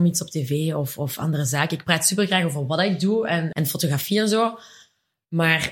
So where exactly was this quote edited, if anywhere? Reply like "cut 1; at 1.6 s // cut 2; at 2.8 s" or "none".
cut 1; at 3.5 s